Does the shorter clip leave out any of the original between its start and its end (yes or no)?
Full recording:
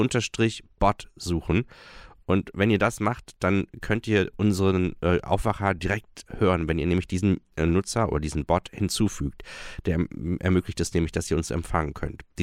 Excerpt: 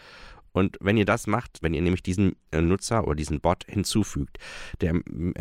yes